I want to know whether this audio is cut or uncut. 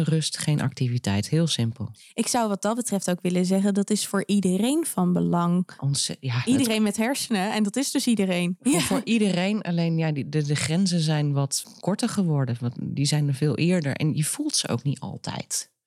uncut